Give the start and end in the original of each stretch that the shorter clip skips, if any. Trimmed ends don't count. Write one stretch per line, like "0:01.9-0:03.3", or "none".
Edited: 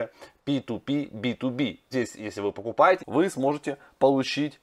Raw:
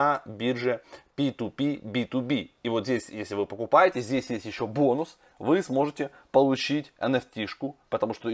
0:02.6-0:02.8
0:03.9-0:05.3